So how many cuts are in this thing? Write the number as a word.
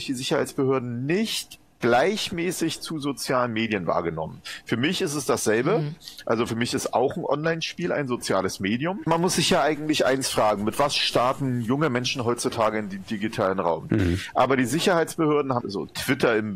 three